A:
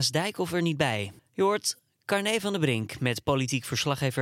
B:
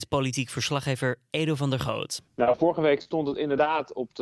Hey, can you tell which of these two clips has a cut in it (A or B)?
A